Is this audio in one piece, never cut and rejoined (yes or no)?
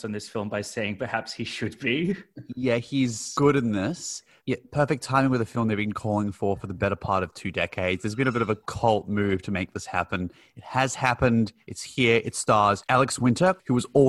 no